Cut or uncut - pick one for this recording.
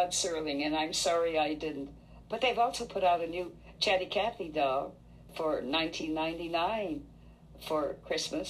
cut